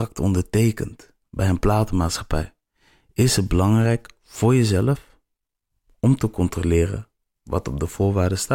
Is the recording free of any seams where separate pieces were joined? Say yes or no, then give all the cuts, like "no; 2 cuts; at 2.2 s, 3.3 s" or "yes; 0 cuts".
yes; 0 cuts